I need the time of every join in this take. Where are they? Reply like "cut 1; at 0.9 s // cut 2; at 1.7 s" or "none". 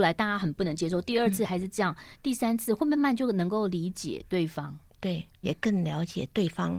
cut 1; at 3.0 s // cut 2; at 5.4 s